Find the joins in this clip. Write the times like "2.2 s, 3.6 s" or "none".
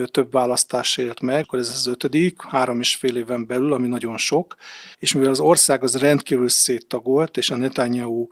1.4 s, 4.9 s